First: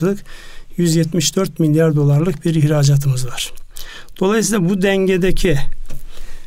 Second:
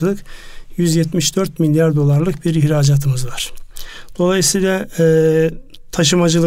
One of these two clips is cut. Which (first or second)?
second